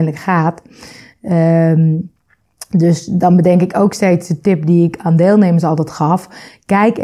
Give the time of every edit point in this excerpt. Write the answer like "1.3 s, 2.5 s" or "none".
none